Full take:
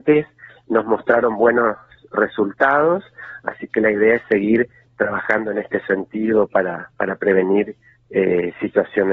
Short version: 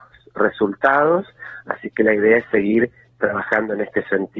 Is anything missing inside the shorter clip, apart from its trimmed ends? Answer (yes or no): no